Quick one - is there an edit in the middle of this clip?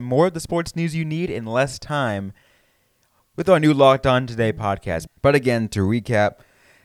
yes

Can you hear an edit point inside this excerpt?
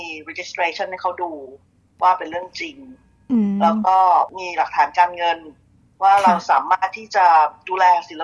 no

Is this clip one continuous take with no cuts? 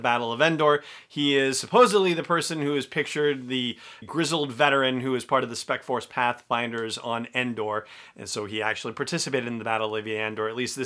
no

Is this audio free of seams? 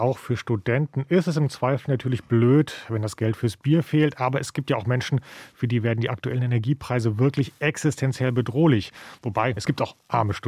no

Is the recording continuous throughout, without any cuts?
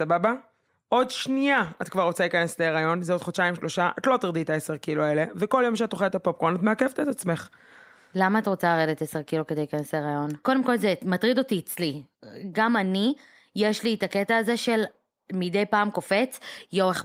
no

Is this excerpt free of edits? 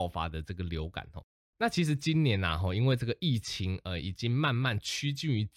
yes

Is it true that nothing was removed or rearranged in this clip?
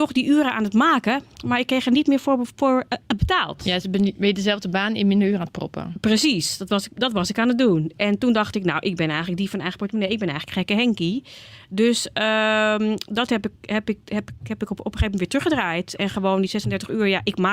yes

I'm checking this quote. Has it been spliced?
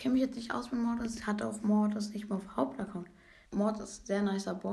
yes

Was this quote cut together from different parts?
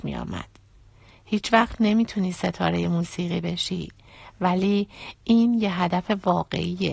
no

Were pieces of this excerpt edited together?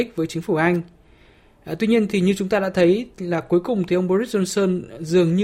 no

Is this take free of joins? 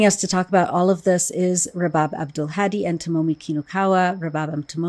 yes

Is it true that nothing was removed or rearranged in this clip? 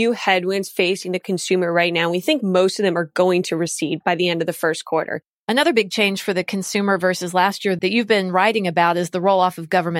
no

